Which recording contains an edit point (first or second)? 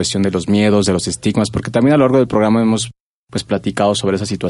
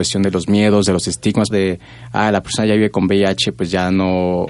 second